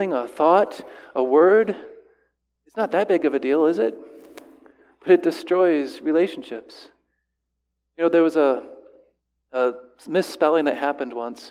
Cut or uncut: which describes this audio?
uncut